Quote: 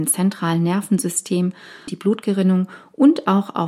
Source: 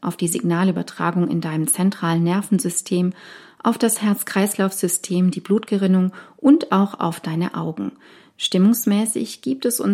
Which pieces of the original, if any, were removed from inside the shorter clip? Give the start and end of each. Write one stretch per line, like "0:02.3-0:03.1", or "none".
0:03.5-0:05.3

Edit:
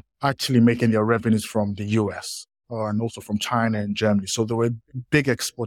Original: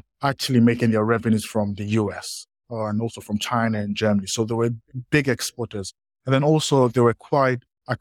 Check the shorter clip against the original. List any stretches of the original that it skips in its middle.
none

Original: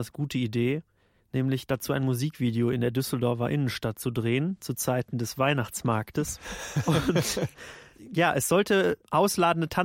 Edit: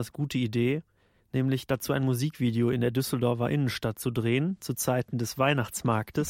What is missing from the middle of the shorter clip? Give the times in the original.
none

